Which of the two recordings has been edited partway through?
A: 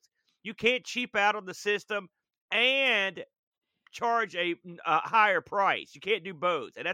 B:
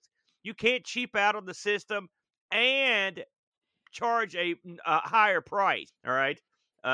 B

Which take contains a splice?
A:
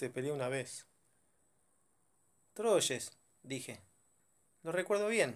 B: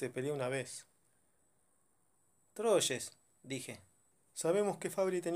B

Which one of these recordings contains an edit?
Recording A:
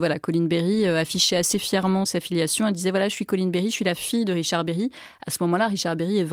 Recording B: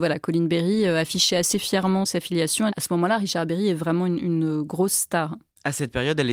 B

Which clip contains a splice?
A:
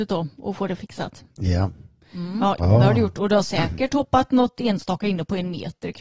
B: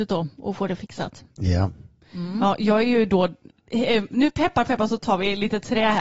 A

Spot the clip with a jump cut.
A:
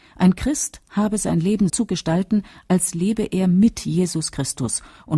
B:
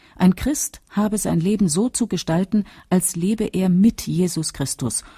A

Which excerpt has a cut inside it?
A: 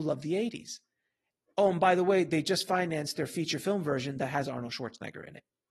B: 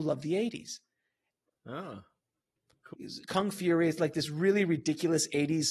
B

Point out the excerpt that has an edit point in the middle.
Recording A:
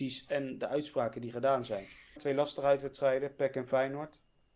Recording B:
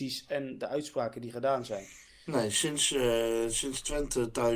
A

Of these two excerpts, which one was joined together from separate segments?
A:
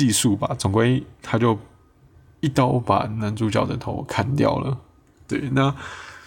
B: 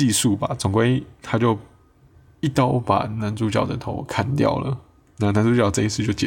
A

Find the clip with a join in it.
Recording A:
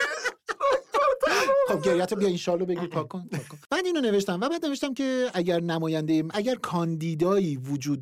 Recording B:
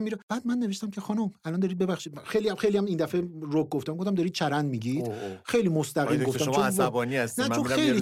A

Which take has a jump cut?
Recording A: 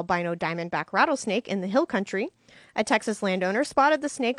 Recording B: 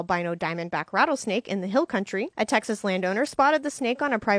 B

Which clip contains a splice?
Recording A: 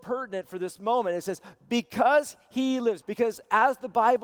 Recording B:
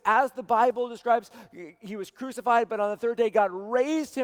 A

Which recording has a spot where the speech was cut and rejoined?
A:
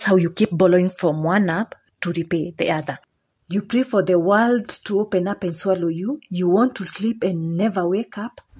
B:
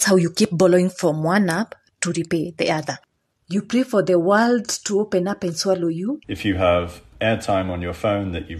B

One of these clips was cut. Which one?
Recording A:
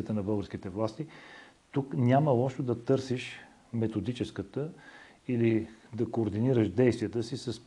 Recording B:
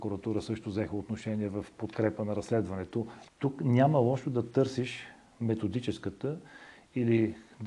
B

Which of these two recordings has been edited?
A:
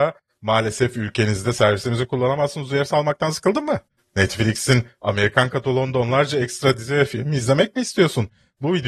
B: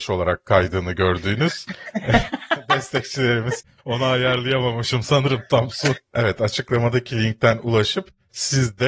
B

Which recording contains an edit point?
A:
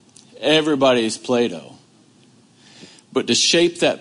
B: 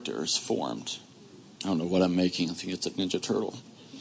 B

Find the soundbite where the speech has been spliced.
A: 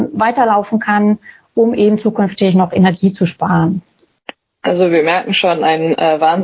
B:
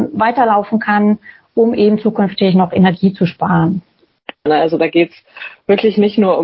B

